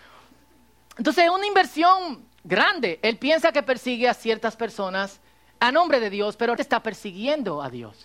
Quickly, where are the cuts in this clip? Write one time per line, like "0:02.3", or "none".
0:06.6